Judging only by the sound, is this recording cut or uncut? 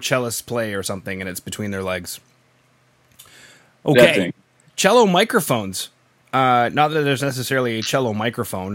uncut